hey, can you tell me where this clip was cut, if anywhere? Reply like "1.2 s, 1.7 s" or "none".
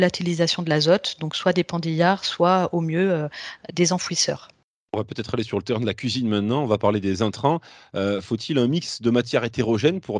none